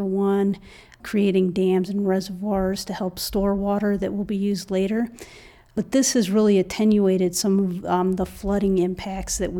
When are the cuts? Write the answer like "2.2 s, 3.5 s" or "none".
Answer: none